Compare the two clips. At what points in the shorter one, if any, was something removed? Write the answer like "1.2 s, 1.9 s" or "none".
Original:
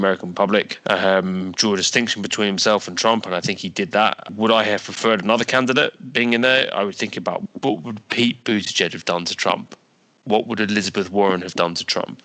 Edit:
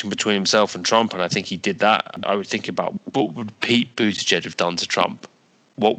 2.2 s